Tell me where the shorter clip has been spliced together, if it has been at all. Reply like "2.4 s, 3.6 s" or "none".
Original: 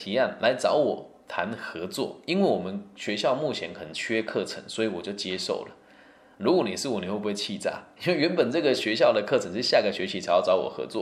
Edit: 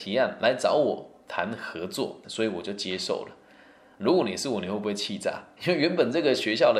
2.2 s